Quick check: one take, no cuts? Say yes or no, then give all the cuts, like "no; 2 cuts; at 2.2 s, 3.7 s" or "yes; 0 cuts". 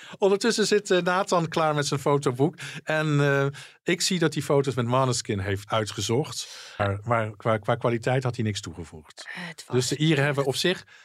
no; 2 cuts; at 5.7 s, 6.8 s